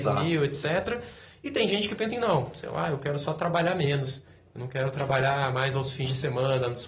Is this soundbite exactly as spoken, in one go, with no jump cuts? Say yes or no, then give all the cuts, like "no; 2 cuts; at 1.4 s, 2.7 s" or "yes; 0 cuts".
no; 1 cut; at 2.1 s